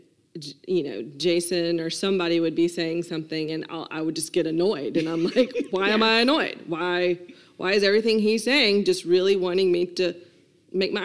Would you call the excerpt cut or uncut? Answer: uncut